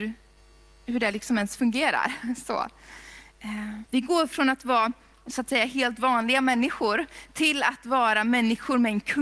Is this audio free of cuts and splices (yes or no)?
no